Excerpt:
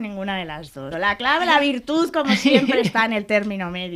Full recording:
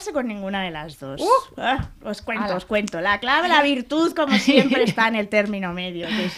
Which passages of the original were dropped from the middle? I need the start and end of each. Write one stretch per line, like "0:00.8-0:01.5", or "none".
0:01.2-0:02.9